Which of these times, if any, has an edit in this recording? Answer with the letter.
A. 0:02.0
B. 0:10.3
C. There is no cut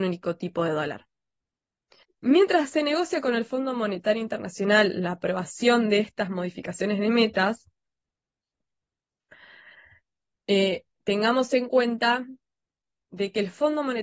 A